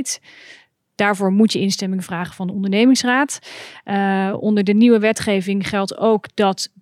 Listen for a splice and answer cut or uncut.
uncut